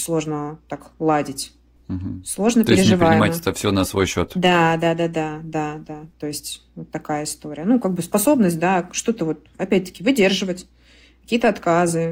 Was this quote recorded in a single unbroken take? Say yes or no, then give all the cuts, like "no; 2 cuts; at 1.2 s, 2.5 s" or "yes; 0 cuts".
yes; 0 cuts